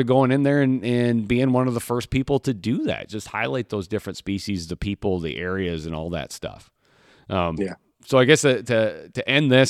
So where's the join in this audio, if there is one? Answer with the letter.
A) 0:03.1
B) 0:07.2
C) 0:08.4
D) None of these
D